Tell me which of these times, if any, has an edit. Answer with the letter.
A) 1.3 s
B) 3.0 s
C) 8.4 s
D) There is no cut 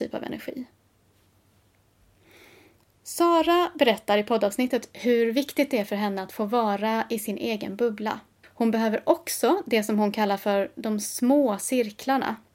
C